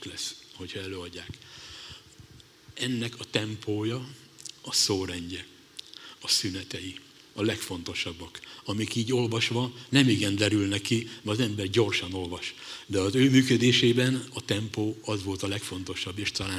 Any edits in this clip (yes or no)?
yes